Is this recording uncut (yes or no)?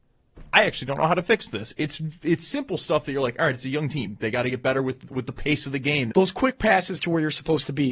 no